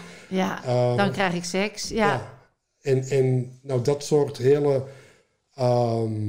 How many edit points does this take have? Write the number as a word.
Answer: one